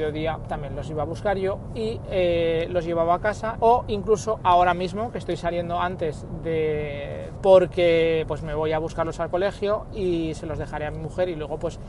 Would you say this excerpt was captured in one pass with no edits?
no; 2 cuts; at 3.5 s, 7.4 s

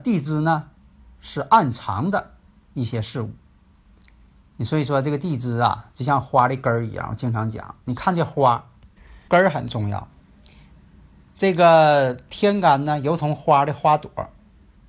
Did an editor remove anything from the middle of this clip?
yes; 1 cut; at 9.3 s

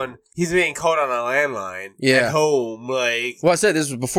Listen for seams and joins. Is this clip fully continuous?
yes; 0 cuts

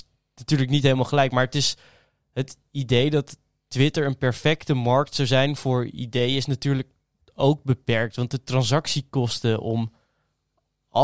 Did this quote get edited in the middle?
no; 0 cuts

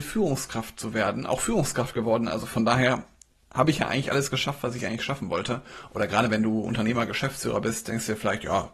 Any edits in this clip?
no; 0 cuts

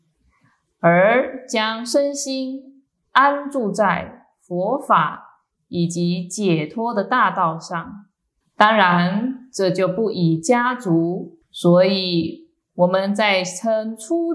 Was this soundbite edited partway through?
yes; 2 cuts; at 8.4 s, 11.4 s

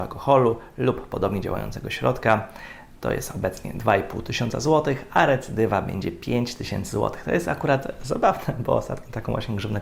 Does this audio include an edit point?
no; 0 cuts

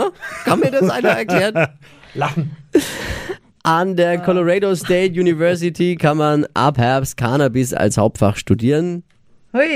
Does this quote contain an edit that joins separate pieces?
no; 0 cuts

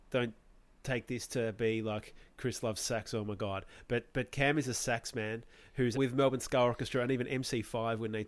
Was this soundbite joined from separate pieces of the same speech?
yes; 1 cut; at 5.9 s

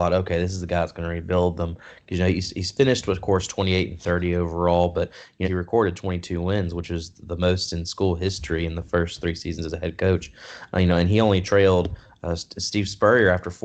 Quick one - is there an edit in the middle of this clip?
yes; 1 cut; at 5.4 s

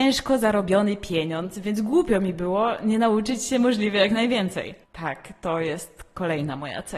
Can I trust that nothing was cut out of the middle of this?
no; 1 cut; at 4.8 s

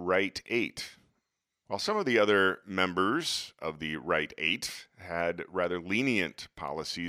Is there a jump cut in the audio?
yes; 1 cut; at 1.6 s

